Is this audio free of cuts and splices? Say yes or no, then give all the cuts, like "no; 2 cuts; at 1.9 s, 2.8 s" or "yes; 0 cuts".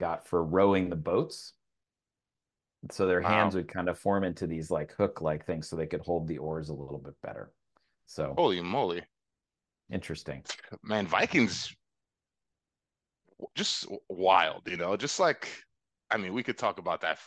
yes; 0 cuts